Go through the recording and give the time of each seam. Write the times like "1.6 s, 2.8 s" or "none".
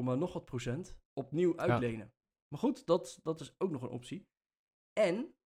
2.5 s